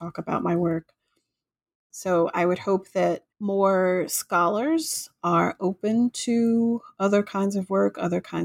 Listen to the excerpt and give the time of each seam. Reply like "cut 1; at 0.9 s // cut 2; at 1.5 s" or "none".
cut 1; at 1.9 s // cut 2; at 3.3 s